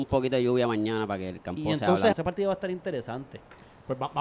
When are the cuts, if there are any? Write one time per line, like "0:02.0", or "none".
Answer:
0:02.1